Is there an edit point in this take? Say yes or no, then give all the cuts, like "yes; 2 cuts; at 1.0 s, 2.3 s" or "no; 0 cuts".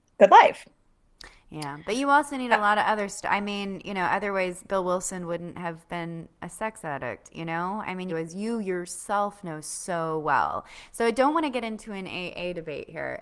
yes; 1 cut; at 8.1 s